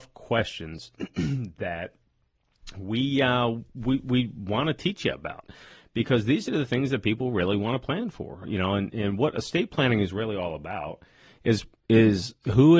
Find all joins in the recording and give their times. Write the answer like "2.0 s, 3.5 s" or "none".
none